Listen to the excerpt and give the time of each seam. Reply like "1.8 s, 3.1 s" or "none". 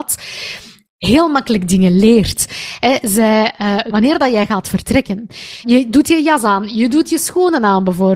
3.9 s, 5.6 s